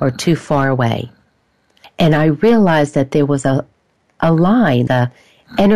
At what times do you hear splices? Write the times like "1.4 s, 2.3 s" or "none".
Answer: 1.8 s, 4.9 s